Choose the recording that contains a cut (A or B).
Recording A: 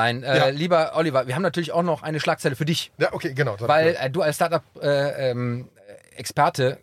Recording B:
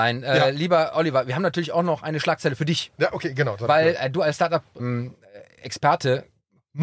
B